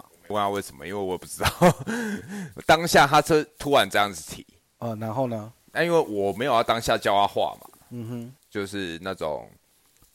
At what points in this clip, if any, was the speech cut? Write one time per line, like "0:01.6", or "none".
0:08.4